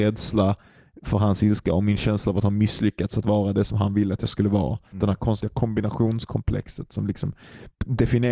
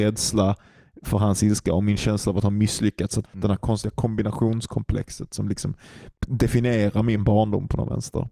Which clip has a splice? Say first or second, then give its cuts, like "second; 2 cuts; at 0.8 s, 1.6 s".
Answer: second; 1 cut; at 3.2 s